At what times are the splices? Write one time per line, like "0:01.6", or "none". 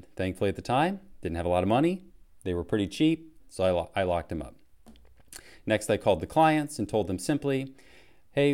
0:03.4